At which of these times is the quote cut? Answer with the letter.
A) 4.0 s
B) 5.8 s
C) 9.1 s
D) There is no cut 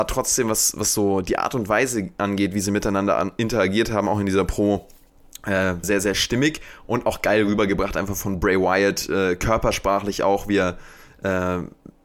B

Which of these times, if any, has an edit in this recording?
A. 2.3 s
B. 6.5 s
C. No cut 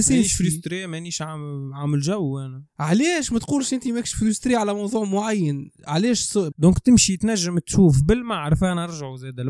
B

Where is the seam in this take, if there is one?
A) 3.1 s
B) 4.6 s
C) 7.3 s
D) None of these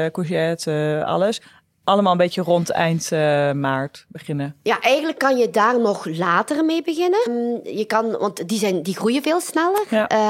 C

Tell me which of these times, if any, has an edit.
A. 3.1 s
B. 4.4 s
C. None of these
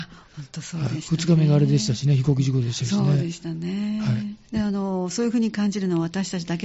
B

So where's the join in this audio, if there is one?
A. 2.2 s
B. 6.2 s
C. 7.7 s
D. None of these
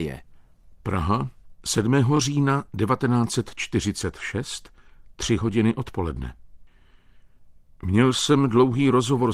D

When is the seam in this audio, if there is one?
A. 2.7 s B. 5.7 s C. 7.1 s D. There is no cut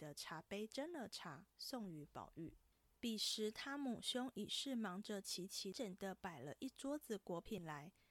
B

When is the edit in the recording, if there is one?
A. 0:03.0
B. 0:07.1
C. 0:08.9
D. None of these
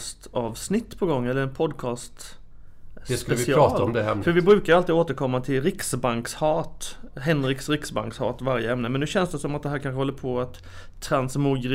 D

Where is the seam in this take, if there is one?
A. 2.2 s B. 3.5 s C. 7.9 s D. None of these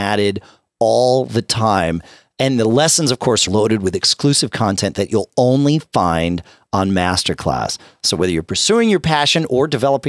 B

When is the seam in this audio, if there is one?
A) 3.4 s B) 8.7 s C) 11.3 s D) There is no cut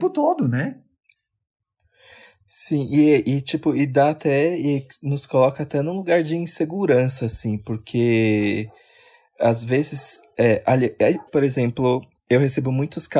C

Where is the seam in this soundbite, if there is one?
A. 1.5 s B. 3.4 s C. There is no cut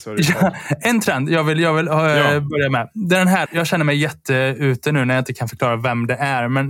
B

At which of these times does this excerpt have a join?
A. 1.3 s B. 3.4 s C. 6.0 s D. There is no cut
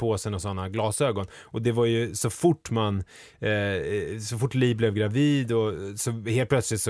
D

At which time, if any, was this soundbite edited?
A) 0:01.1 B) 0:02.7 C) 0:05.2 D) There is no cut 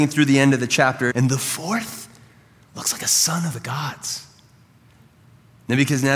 A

